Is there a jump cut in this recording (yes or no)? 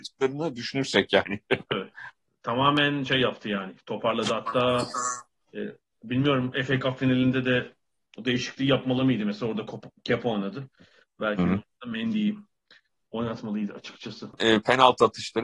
no